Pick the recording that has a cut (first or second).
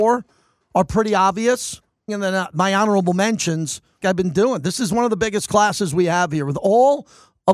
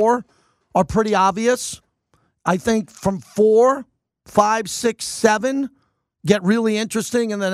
first